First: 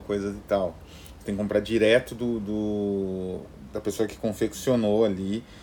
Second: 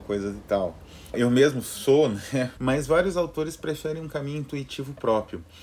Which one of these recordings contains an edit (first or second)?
second